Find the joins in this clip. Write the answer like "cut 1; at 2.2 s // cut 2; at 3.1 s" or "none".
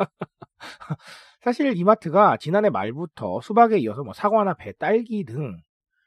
none